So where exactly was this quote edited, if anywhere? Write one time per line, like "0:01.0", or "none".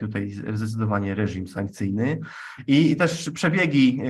none